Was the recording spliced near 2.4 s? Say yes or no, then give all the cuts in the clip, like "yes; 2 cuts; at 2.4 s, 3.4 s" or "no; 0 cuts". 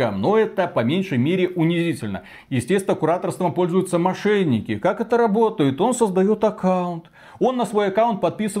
no; 0 cuts